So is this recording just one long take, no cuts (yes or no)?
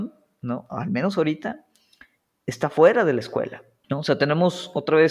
no